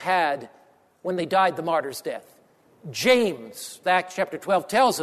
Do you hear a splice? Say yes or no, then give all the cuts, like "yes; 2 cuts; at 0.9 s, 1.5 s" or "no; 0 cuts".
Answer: yes; 1 cut; at 3.8 s